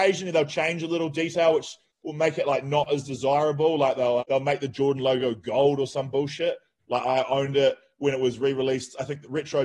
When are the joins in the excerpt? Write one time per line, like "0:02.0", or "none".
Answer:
0:04.2
0:06.8